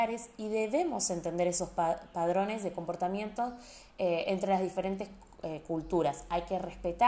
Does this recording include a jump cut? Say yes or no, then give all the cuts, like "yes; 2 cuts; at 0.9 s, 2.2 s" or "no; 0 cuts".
no; 0 cuts